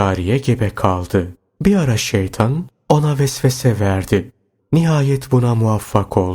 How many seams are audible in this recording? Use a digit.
2